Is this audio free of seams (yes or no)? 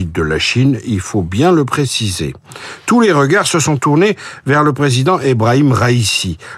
yes